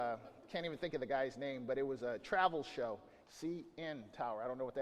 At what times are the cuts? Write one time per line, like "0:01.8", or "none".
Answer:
0:03.2